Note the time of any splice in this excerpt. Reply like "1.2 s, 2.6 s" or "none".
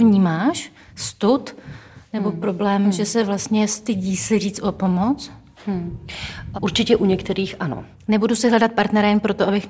6.5 s, 7.9 s